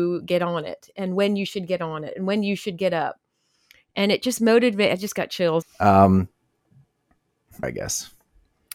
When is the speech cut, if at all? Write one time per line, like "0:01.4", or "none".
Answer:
0:05.6
0:07.6